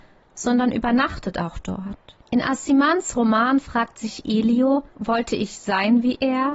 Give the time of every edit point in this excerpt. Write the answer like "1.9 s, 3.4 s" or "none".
2.2 s, 4.9 s